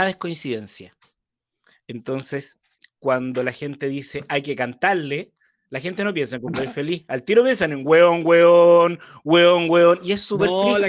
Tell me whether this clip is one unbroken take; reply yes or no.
yes